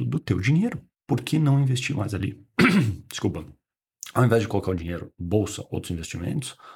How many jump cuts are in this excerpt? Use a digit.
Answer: 1